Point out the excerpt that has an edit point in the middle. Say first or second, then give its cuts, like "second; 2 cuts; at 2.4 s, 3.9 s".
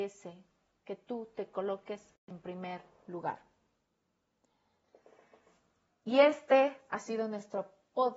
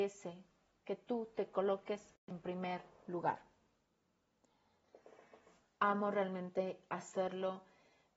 second; 1 cut; at 5.6 s